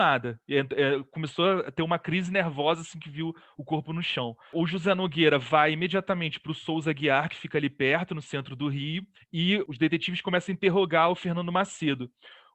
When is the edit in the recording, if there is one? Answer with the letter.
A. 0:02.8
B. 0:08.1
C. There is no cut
C